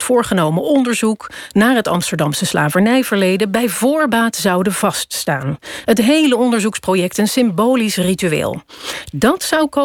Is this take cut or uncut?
uncut